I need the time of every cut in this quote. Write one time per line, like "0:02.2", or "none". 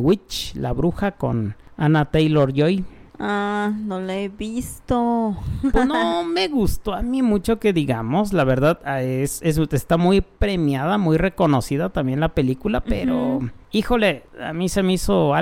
none